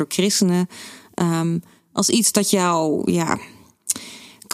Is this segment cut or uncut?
uncut